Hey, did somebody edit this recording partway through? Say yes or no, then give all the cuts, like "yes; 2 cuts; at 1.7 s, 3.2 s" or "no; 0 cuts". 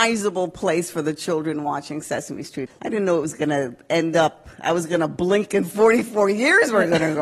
yes; 1 cut; at 2.7 s